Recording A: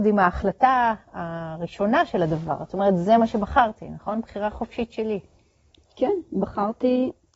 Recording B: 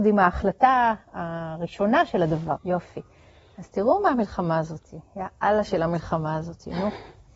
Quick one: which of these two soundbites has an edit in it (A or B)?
B